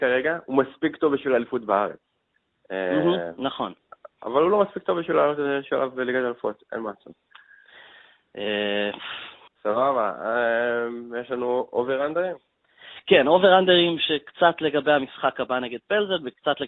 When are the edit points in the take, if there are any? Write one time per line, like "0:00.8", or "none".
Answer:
0:09.5

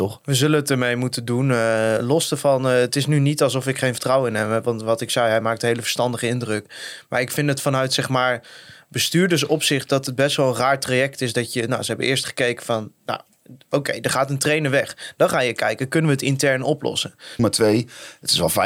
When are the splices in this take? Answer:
0:17.4

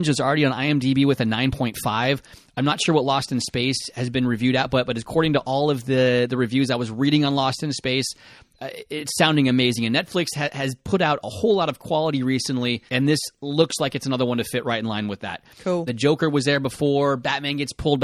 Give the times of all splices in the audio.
0:12.9
0:15.9

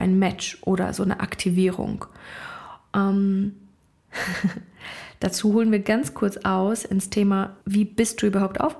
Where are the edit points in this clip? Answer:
0:07.6

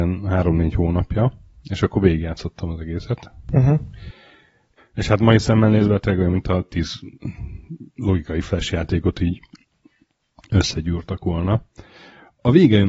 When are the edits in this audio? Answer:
0:04.8

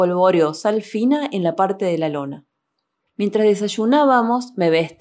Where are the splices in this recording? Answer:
0:03.1

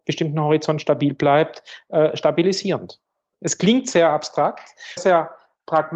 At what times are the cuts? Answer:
0:03.3
0:05.0

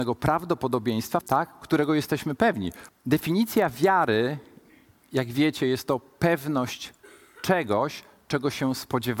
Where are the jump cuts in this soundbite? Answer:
0:01.2
0:02.9

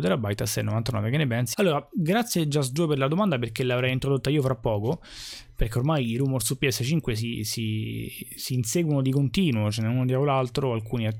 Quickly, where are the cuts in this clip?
0:01.5

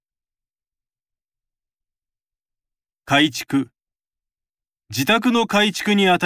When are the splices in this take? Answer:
none

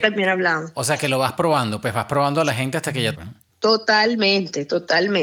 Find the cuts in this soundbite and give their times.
0:03.1

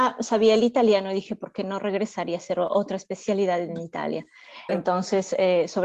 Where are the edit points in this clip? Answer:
0:04.7

